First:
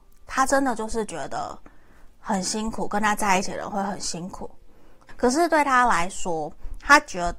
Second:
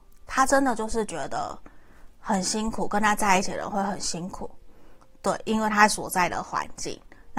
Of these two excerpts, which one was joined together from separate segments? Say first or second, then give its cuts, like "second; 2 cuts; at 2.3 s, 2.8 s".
first; 1 cut; at 5.1 s